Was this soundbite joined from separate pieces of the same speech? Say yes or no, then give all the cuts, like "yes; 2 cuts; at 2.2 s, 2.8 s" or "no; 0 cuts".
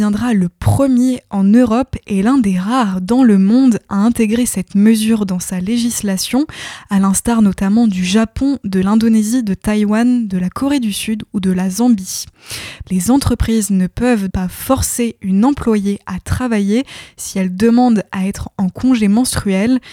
yes; 2 cuts; at 12.8 s, 14.3 s